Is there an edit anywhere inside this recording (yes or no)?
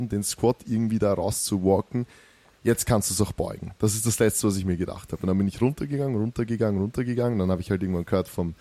no